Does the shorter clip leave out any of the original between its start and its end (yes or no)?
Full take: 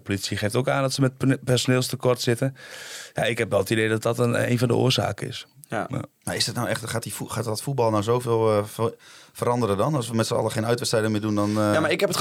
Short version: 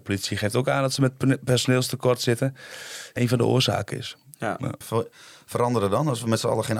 yes